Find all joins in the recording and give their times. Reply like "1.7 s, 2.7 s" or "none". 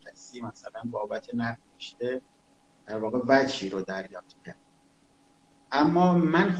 1.7 s